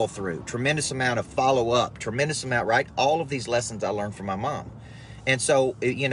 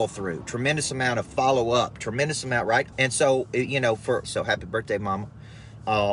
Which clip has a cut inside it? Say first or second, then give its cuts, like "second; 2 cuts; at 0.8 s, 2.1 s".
second; 2 cuts; at 2.9 s, 4.2 s